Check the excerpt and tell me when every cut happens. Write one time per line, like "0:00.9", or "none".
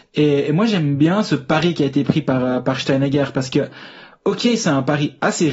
none